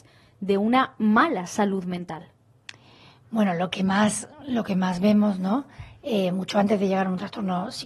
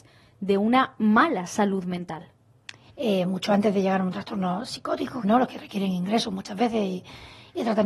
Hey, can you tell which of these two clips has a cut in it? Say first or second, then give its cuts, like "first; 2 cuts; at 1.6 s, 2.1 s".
second; 2 cuts; at 2.9 s, 5.2 s